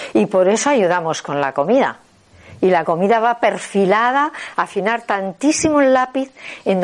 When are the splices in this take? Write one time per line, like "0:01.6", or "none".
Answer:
none